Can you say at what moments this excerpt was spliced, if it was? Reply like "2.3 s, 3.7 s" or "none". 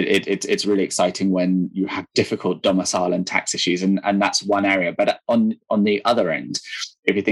none